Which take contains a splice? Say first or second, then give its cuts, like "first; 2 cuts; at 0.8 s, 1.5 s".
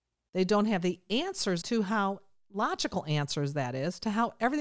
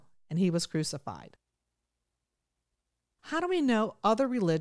first; 1 cut; at 1.6 s